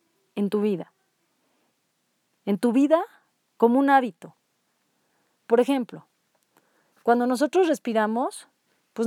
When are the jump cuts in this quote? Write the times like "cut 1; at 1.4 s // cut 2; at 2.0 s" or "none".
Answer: none